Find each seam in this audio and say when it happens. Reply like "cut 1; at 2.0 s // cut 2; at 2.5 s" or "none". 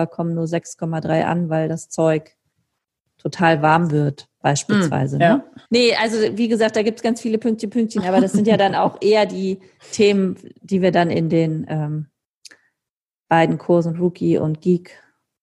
cut 1; at 5.7 s